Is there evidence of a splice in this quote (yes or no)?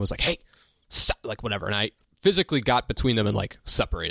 no